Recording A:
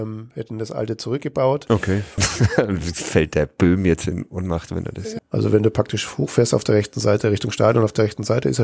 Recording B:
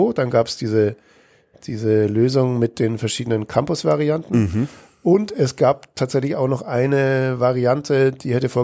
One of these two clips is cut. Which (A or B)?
A